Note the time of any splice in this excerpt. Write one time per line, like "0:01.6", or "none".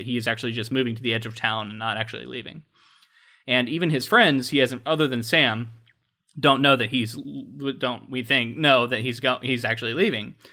none